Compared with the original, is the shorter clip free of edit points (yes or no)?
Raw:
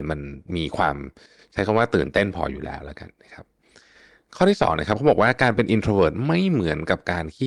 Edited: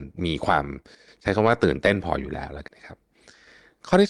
no